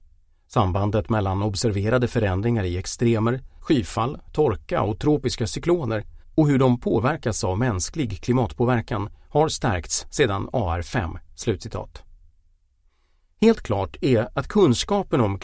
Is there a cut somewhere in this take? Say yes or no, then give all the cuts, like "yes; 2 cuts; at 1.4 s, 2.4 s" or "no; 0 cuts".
yes; 1 cut; at 3.6 s